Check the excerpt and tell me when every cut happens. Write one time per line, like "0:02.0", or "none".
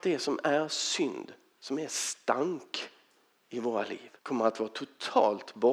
0:04.2